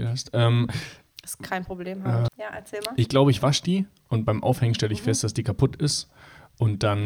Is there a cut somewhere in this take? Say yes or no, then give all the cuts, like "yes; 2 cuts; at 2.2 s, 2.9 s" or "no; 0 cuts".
yes; 1 cut; at 2.3 s